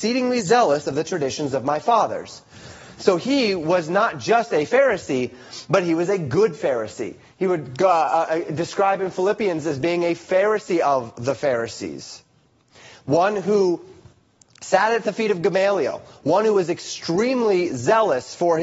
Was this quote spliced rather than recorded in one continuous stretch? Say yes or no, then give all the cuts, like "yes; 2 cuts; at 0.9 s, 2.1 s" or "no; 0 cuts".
no; 0 cuts